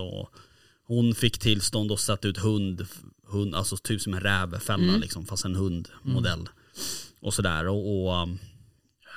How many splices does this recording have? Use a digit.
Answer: 0